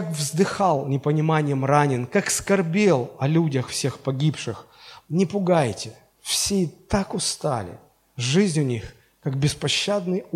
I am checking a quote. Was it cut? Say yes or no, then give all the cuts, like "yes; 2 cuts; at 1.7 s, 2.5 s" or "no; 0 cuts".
yes; 1 cut; at 5.0 s